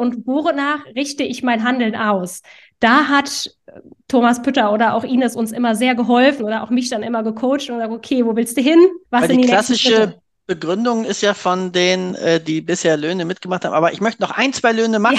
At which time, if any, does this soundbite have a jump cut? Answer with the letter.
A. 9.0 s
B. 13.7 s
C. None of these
A